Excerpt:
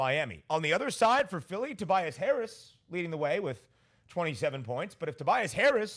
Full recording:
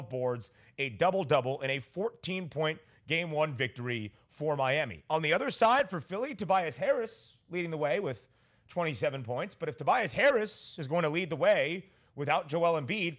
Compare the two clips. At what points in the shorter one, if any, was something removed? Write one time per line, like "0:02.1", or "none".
none